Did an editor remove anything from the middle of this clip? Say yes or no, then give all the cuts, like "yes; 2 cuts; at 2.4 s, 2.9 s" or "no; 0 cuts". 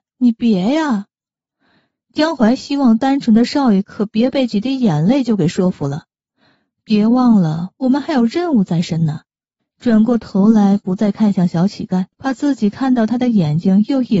yes; 2 cuts; at 9.6 s, 12.1 s